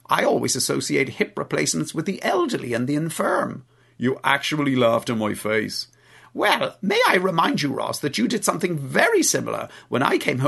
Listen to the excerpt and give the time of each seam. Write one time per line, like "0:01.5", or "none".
none